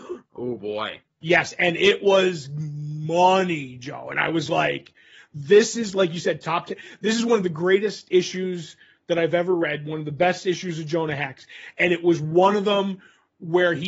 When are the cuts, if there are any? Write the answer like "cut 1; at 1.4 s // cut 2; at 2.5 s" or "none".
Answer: none